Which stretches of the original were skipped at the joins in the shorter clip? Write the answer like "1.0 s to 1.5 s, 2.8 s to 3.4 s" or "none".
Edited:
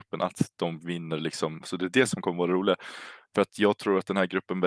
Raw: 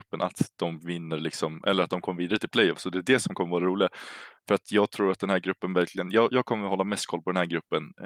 1.6 s to 2.7 s